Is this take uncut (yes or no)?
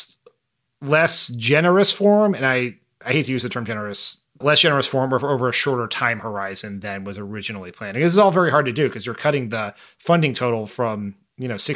no